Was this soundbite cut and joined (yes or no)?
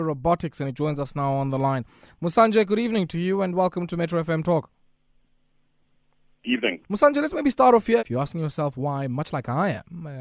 yes